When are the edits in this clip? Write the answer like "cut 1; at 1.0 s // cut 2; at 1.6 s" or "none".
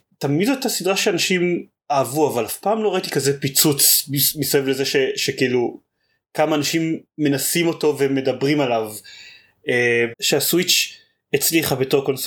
cut 1; at 10.1 s